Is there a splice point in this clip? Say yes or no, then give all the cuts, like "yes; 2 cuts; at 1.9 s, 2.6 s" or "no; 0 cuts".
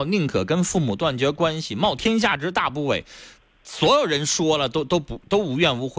no; 0 cuts